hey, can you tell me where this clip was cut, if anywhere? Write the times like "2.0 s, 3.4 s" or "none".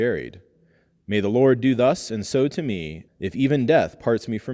3.1 s